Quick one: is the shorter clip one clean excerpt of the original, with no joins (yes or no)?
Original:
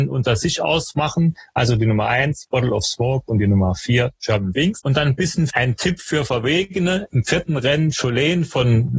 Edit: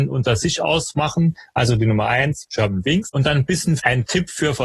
no